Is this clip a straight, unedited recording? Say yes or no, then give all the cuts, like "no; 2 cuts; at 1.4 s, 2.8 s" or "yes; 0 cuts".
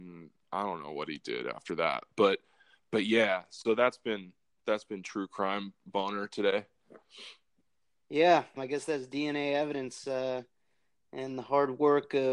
no; 1 cut; at 8.6 s